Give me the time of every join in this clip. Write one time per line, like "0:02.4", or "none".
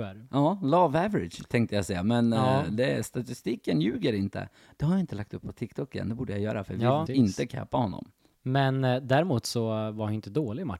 0:07.1
0:08.3